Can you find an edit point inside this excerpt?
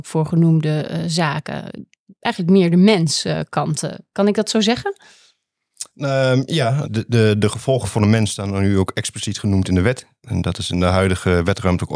yes; 1 cut; at 6.8 s

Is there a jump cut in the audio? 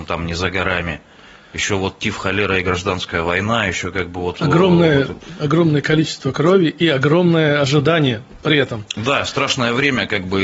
no; 0 cuts

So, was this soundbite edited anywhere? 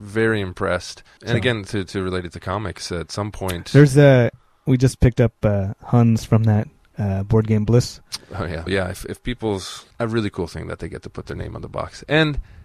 yes; 3 cuts; at 1.2 s, 8.7 s, 9.9 s

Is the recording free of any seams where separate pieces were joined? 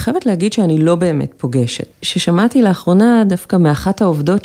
no; 1 cut; at 1.9 s

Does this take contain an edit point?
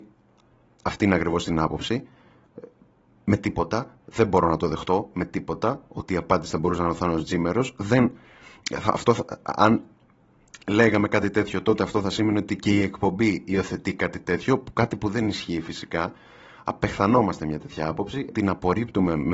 yes; 1 cut; at 18.3 s

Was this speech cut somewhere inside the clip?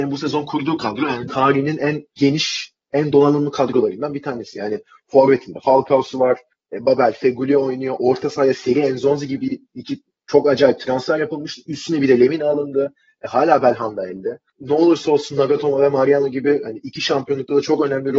no; 0 cuts

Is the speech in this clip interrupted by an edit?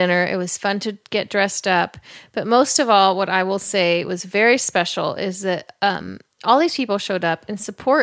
no; 0 cuts

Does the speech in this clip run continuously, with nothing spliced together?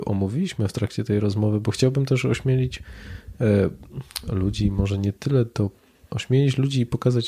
no; 1 cut; at 6.1 s

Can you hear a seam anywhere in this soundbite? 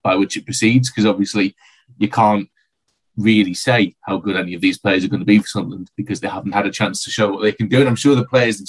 yes; 1 cut; at 6.5 s

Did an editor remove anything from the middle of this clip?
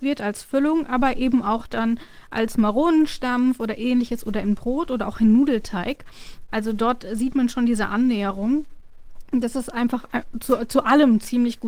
no; 0 cuts

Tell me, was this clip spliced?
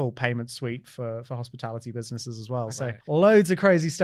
yes; 1 cut; at 3.0 s

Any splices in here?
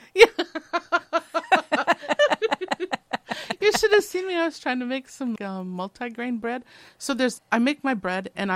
yes; 2 cuts; at 5.4 s, 7.4 s

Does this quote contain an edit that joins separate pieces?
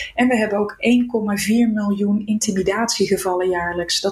no; 0 cuts

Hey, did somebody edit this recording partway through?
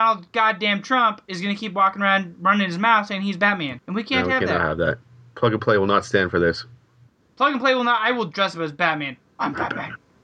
yes; 1 cut; at 3.8 s

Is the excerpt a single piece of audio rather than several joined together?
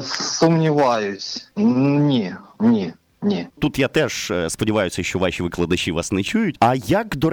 yes; 0 cuts

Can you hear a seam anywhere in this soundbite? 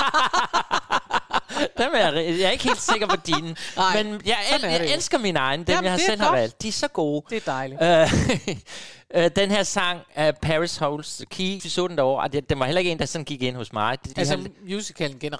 yes; 2 cuts; at 11.6 s, 14.1 s

